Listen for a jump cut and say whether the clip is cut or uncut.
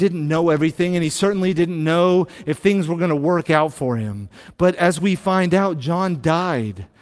uncut